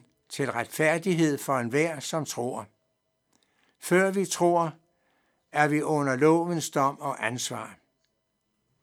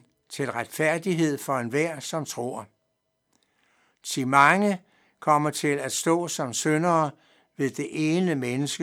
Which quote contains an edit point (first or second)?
first